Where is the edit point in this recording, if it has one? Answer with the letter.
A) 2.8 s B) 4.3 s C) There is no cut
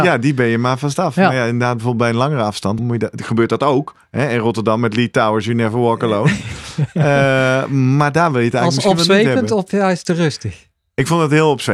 A